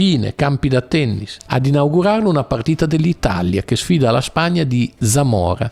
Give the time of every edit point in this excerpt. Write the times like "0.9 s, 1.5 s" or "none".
1.4 s